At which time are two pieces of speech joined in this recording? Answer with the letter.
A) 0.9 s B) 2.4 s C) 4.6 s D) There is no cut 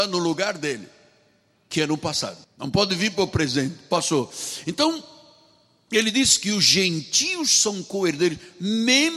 B